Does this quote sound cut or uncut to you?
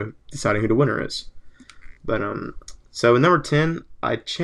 uncut